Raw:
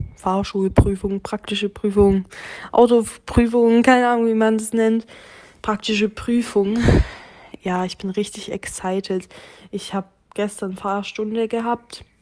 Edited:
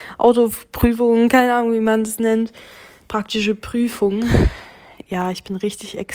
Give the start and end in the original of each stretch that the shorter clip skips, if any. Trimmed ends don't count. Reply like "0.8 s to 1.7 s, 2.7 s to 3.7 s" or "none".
none